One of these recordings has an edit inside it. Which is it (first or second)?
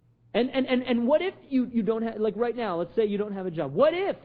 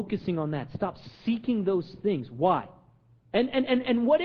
second